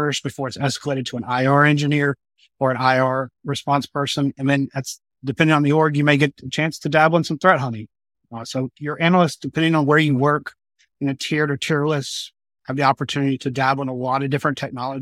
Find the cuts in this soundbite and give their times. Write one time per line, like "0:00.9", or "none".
none